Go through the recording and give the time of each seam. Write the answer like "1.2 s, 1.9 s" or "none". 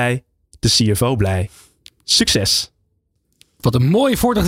none